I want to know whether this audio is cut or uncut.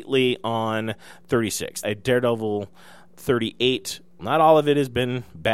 cut